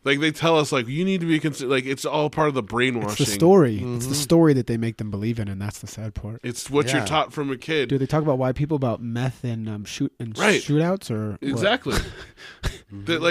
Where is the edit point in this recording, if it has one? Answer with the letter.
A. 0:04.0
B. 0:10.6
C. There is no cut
C